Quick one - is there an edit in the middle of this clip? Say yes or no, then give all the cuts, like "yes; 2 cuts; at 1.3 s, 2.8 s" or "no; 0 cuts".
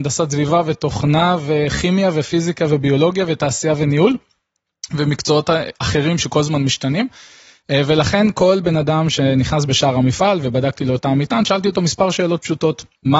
no; 0 cuts